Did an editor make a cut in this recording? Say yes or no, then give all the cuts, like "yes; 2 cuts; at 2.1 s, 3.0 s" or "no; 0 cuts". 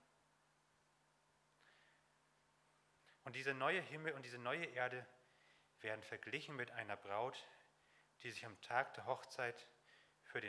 yes; 1 cut; at 3.2 s